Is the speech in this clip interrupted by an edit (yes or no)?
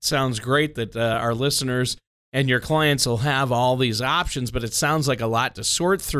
no